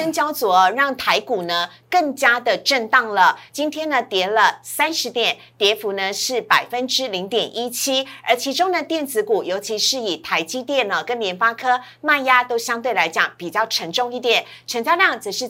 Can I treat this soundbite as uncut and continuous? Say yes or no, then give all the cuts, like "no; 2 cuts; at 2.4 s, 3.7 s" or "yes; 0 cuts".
no; 1 cut; at 3.5 s